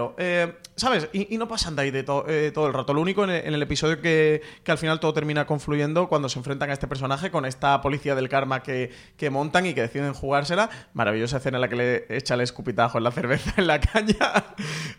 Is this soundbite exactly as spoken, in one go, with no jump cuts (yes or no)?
yes